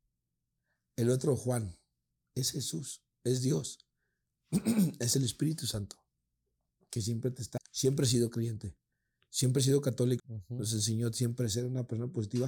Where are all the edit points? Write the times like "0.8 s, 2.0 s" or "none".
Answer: 7.6 s, 10.2 s